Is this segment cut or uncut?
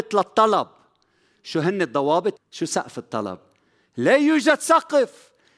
cut